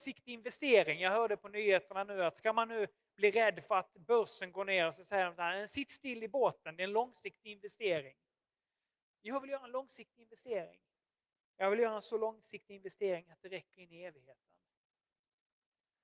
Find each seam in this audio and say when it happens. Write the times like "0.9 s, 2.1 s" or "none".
none